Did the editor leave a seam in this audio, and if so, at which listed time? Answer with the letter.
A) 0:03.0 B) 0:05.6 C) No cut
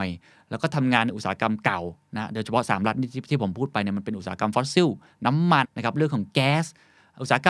B